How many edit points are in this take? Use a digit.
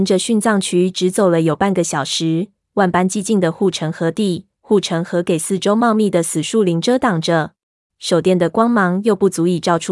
2